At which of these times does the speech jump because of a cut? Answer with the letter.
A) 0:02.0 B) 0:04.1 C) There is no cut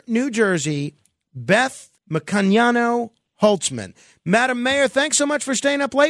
A